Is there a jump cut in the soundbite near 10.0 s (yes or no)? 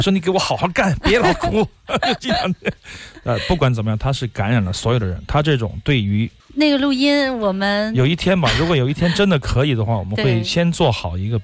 no